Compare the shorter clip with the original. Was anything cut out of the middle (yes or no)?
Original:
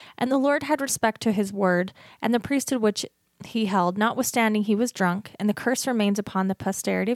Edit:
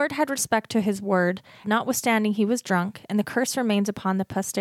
yes